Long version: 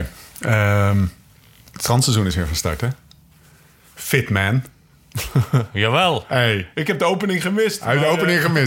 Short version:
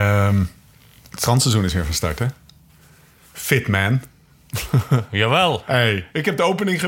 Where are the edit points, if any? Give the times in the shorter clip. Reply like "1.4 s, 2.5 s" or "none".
none